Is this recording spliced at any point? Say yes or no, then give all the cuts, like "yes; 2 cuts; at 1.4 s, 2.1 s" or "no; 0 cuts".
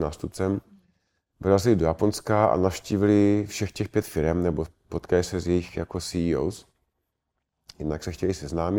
no; 0 cuts